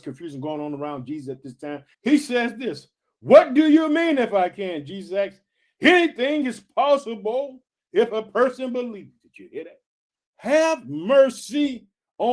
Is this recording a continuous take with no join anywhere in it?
no; 2 cuts; at 1.9 s, 10.2 s

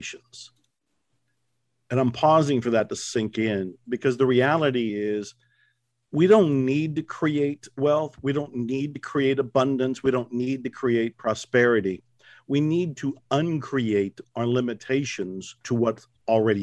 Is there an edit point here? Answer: no; 0 cuts

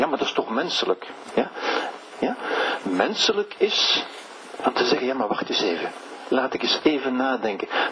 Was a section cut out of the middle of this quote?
yes; 1 cut; at 2.1 s

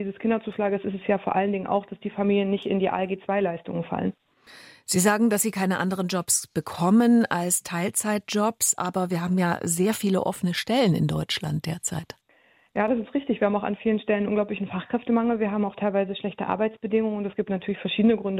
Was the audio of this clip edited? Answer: no; 0 cuts

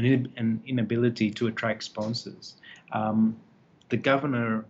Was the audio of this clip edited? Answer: no; 0 cuts

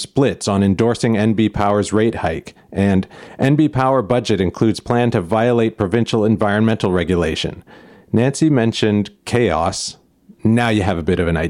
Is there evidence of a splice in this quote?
no; 0 cuts

